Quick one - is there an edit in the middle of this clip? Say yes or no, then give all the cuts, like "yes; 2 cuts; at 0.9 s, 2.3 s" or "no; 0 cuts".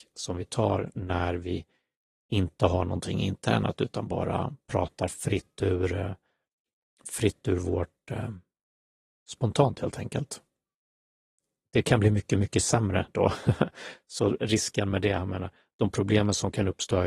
no; 0 cuts